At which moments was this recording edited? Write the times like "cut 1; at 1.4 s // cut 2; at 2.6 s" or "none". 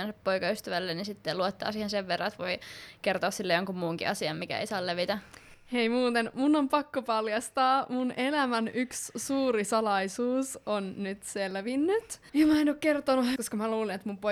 cut 1; at 12.3 s // cut 2; at 13.4 s